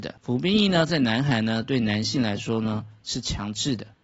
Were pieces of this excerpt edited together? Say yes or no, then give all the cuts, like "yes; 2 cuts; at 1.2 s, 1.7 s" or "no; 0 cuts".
no; 0 cuts